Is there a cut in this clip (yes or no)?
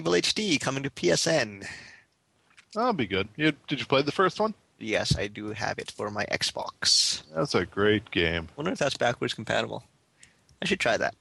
no